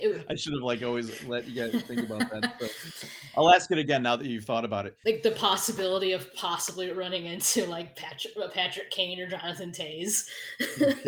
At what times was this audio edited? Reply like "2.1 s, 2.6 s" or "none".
5.0 s